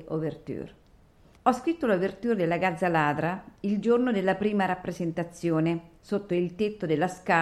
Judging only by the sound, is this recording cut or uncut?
cut